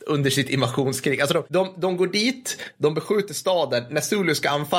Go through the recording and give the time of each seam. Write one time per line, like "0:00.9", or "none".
none